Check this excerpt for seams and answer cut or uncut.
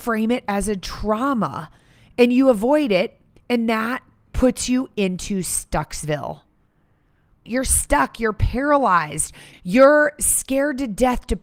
cut